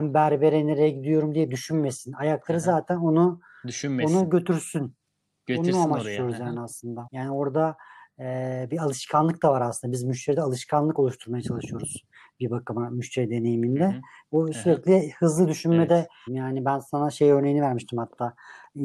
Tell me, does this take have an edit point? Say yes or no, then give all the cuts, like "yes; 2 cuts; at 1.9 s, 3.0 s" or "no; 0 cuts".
yes; 3 cuts; at 7.1 s, 14.3 s, 16.3 s